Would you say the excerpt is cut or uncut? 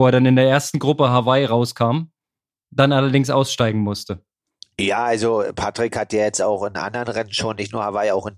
uncut